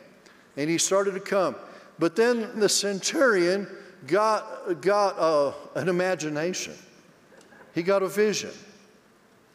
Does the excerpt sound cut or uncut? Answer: cut